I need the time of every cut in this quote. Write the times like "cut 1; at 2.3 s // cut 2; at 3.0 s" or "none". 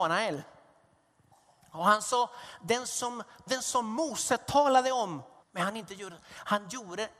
cut 1; at 3.5 s // cut 2; at 5.4 s